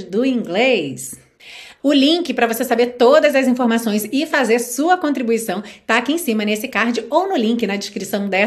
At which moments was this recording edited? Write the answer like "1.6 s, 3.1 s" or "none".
1.8 s